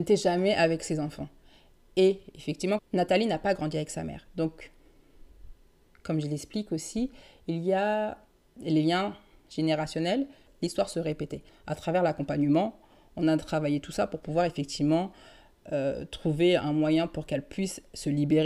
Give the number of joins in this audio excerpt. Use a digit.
2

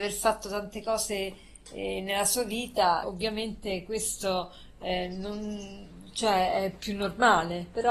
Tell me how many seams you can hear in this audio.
1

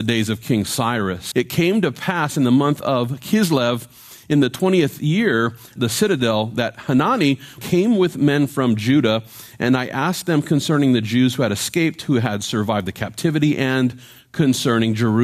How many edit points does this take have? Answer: 3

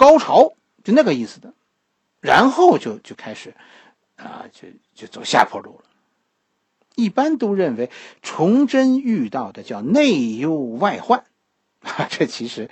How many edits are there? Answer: 0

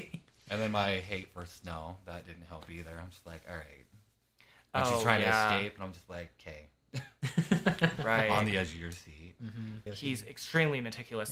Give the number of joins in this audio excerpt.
1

